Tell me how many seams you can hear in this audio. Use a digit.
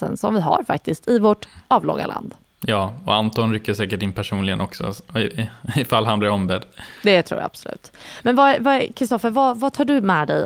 0